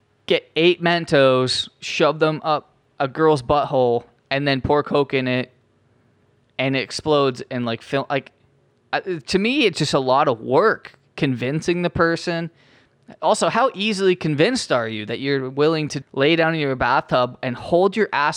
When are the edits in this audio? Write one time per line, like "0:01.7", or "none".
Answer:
0:16.0